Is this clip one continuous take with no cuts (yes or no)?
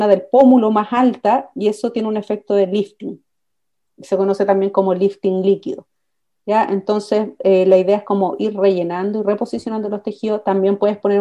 yes